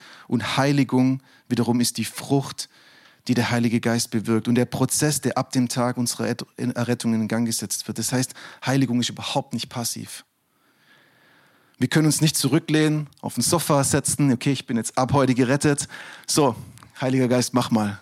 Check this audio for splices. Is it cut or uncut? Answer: uncut